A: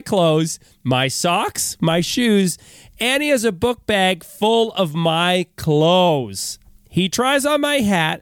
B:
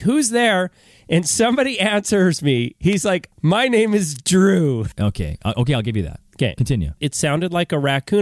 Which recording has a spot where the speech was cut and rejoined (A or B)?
B